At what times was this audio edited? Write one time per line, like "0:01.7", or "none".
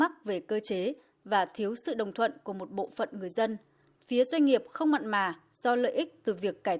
0:03.9